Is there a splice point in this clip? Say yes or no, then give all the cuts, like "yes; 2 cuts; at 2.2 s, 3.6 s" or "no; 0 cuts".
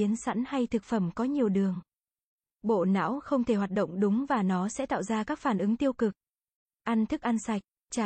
no; 0 cuts